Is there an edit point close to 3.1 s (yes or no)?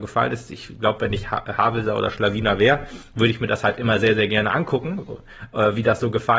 no